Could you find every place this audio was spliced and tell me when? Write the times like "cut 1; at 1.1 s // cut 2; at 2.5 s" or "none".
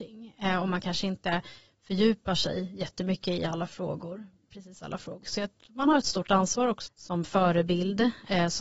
cut 1; at 5.2 s // cut 2; at 6.9 s